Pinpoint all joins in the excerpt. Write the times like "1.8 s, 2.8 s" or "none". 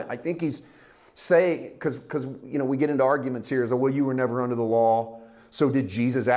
none